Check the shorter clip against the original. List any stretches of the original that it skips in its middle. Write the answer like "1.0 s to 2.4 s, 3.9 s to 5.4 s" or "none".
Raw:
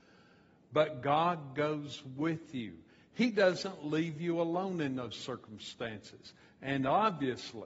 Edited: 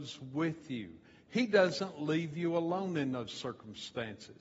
none